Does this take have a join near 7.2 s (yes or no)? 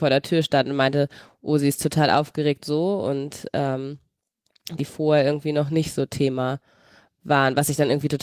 no